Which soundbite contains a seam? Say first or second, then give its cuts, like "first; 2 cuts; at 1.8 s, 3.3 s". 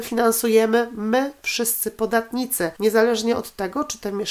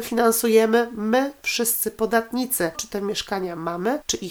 second; 1 cut; at 2.7 s